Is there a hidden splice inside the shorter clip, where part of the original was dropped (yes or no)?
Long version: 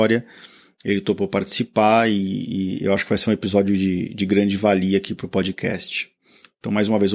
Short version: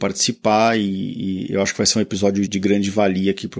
yes